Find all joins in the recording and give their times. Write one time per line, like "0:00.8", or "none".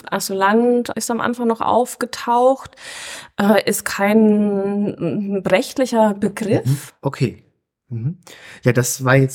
0:00.9
0:06.9